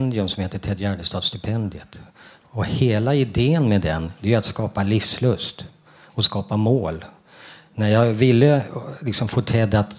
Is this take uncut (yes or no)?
yes